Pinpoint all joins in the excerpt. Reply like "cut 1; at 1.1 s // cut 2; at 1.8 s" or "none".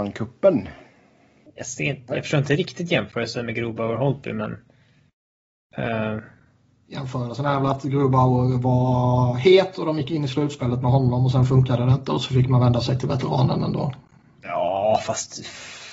cut 1; at 1.5 s